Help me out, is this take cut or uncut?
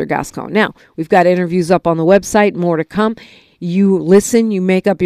uncut